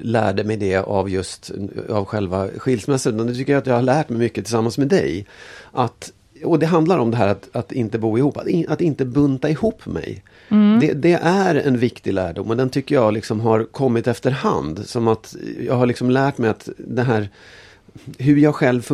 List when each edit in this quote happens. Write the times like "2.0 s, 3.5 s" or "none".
none